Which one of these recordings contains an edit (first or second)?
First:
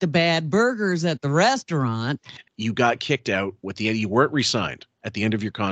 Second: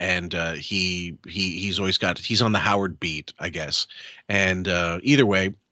first